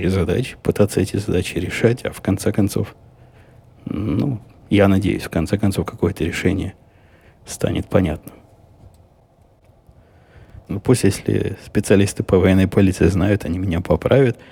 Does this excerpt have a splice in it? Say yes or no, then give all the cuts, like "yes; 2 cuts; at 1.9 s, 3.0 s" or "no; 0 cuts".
yes; 1 cut; at 10.7 s